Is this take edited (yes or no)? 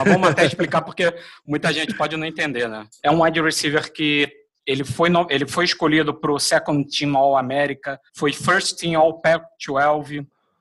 yes